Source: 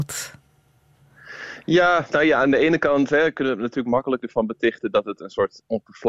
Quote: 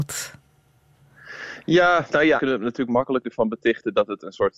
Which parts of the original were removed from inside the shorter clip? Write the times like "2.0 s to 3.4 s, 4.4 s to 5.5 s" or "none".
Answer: 2.4 s to 3.3 s